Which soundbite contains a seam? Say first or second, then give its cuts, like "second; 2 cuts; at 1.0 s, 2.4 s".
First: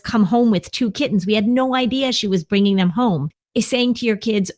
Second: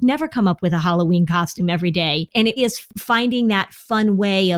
second; 1 cut; at 2.6 s